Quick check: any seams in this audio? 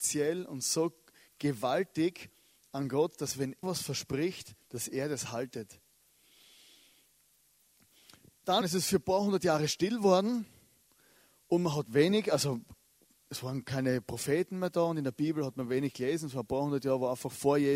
yes; 2 cuts; at 3.6 s, 8.6 s

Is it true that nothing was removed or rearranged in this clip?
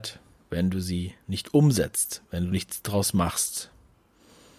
yes; 0 cuts

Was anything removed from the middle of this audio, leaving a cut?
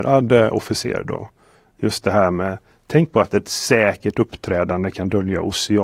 no; 0 cuts

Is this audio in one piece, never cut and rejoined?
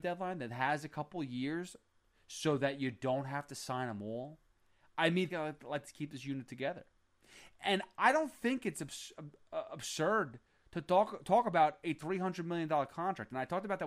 no; 1 cut; at 5.3 s

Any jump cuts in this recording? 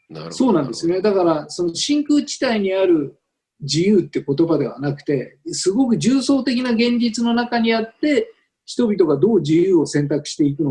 no; 0 cuts

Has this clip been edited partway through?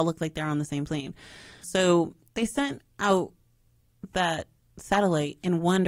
yes; 1 cut; at 1.6 s

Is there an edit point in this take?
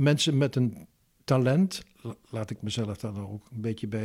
no; 0 cuts

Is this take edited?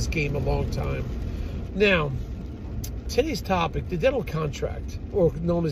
yes; 2 cuts; at 1.7 s, 3.1 s

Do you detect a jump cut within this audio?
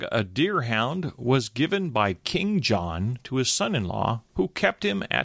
yes; 1 cut; at 4.3 s

